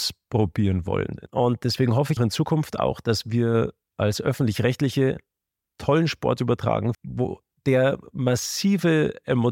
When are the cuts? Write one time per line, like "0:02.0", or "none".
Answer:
0:02.2
0:06.9